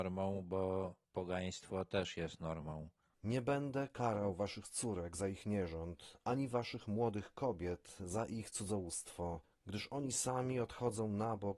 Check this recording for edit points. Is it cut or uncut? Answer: uncut